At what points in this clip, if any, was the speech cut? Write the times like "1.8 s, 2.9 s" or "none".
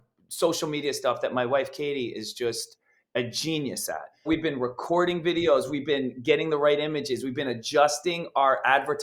none